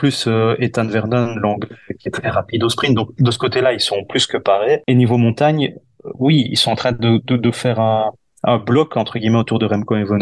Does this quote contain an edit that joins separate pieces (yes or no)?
no